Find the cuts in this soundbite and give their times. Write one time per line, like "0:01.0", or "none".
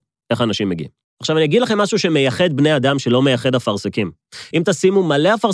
none